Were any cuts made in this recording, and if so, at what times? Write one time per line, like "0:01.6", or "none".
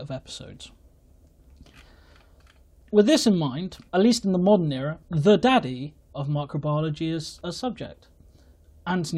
0:03.9
0:05.0